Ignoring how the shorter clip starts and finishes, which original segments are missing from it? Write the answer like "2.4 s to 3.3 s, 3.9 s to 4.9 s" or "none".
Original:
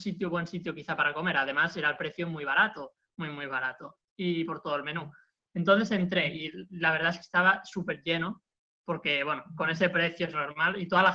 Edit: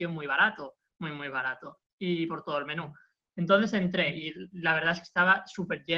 none